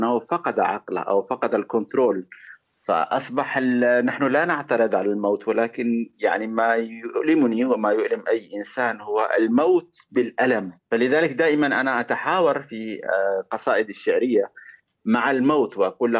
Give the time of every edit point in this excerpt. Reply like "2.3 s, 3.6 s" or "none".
10.8 s